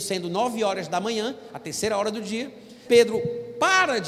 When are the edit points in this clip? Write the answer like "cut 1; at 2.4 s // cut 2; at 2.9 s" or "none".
cut 1; at 2.8 s

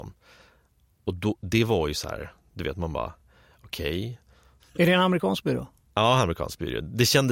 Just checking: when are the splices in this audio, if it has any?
none

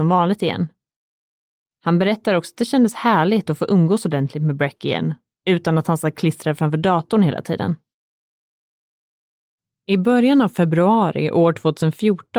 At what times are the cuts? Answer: cut 1; at 1.8 s

